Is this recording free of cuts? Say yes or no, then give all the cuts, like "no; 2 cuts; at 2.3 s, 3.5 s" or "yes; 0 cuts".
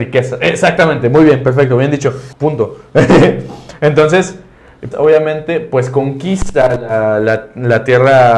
no; 2 cuts; at 2.3 s, 4.9 s